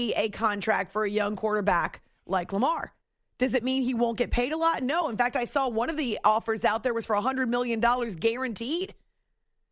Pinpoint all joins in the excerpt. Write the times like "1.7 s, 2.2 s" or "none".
none